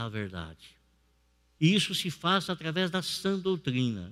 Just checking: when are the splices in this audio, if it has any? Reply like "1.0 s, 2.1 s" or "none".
1.6 s